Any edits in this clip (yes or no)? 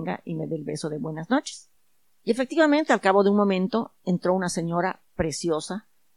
no